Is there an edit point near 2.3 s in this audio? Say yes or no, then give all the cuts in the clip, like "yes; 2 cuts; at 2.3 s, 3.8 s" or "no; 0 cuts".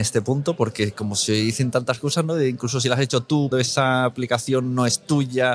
no; 1 cut; at 3.5 s